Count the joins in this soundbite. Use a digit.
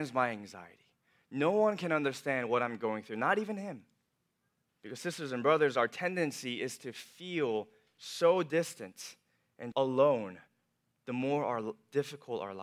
2